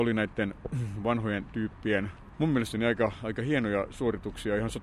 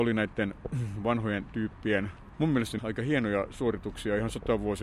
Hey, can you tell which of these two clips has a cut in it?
second; 1 cut; at 2.8 s

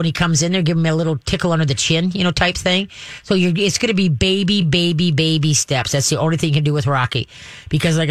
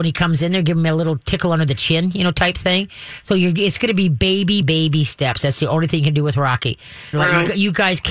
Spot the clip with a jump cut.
second; 2 cuts; at 4.6 s, 7.1 s

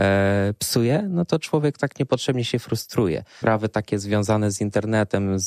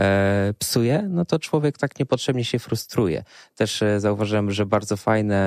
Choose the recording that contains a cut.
first; 1 cut; at 3.4 s

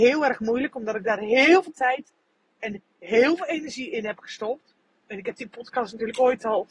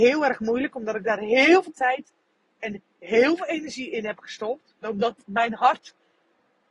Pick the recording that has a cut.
second; 1 cut; at 4.8 s

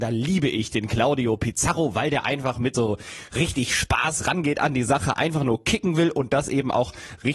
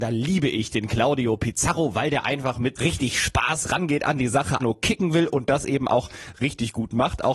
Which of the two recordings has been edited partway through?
second; 2 cuts; at 2.7 s, 4.6 s

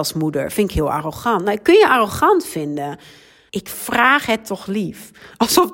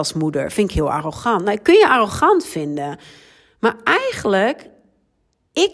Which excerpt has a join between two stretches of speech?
first; 1 cut; at 3.5 s

